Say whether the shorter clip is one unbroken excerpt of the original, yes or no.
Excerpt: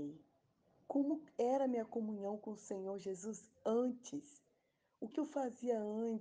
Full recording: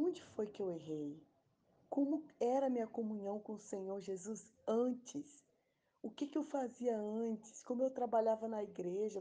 no